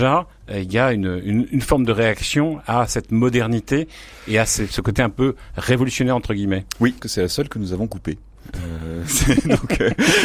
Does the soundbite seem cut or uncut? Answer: cut